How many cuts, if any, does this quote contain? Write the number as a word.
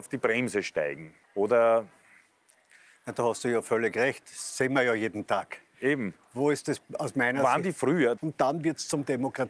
two